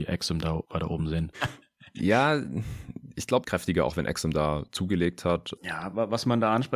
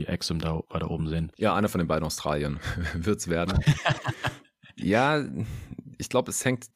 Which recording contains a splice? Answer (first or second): first